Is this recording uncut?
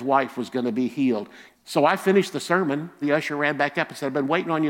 no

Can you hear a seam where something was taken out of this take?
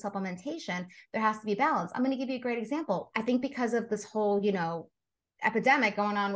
yes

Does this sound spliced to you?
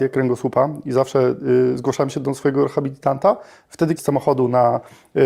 yes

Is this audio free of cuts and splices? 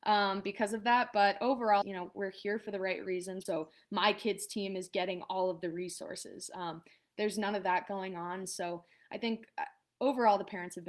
no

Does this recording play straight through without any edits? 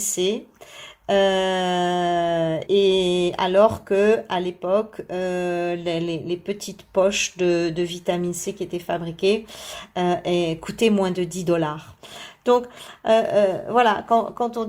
no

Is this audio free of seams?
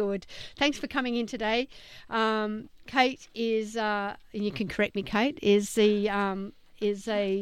yes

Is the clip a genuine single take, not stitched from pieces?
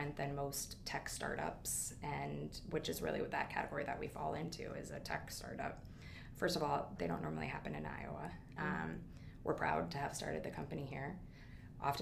no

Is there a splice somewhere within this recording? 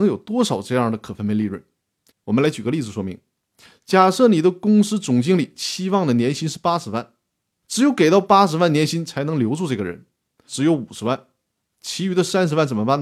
yes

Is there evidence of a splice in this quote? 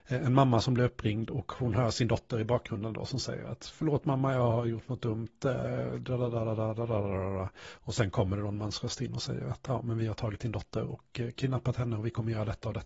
no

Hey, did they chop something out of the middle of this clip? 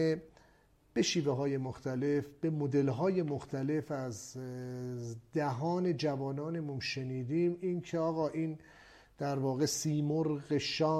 no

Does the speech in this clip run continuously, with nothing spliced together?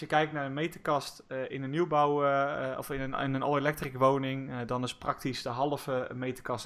yes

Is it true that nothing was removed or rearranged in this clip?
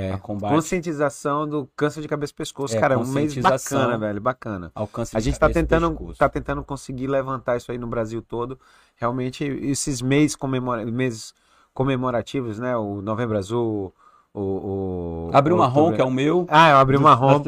yes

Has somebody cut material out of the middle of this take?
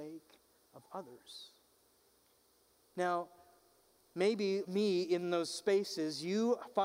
yes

